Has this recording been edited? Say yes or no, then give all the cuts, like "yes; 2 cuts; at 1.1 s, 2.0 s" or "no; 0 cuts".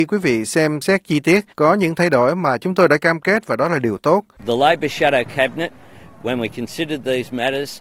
yes; 2 cuts; at 1.5 s, 4.4 s